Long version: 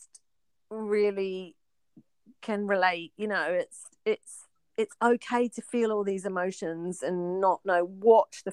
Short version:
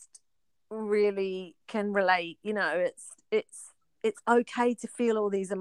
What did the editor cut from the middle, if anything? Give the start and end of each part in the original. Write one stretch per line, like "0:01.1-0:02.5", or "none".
0:01.6-0:02.3